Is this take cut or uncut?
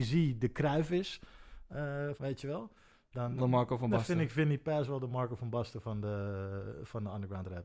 cut